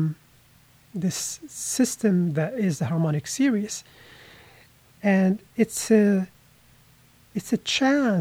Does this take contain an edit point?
no; 0 cuts

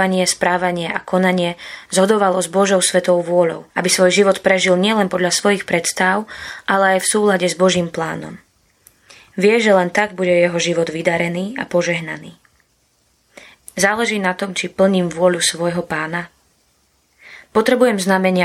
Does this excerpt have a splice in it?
yes; 2 cuts; at 3.7 s, 13.6 s

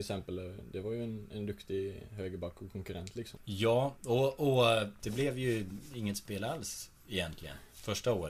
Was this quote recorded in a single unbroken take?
no; 2 cuts; at 3.4 s, 5.0 s

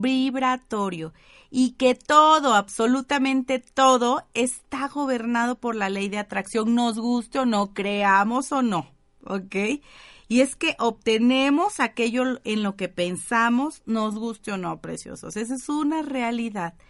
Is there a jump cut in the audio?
no; 0 cuts

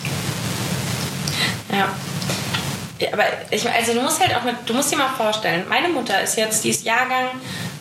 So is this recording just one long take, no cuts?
yes; 0 cuts

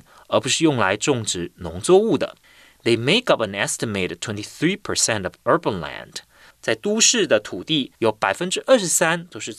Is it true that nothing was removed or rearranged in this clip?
no; 2 cuts; at 6.5 s, 8.0 s

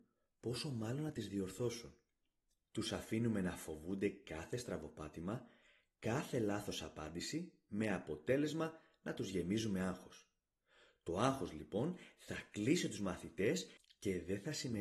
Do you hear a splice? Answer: no; 0 cuts

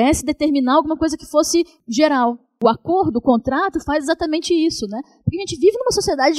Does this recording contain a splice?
no; 0 cuts

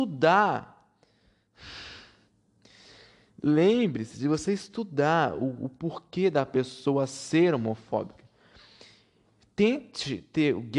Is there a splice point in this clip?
no; 0 cuts

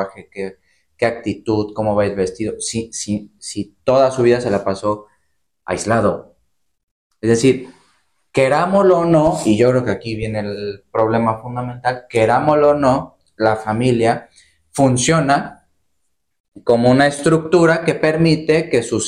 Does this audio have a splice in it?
no; 0 cuts

